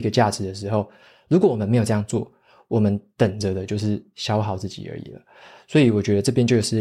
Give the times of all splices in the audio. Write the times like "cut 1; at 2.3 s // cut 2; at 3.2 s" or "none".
none